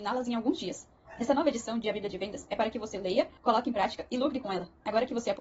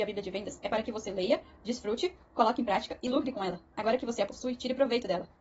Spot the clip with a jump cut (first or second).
first